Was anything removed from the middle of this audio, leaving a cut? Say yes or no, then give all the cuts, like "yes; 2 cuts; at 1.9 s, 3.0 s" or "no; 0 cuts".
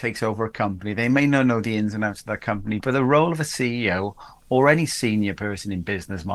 no; 0 cuts